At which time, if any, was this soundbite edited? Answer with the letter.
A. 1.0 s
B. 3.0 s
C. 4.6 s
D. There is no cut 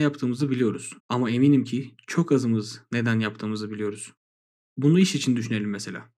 A